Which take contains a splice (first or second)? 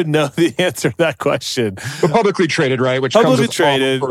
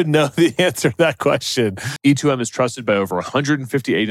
second